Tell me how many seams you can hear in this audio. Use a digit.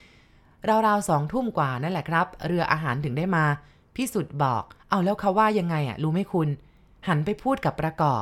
1